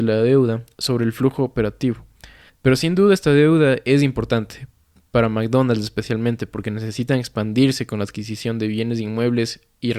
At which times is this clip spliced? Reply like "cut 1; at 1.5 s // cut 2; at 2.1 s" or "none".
cut 1; at 2.5 s